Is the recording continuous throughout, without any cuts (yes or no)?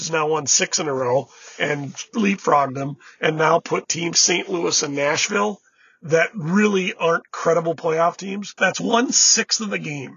no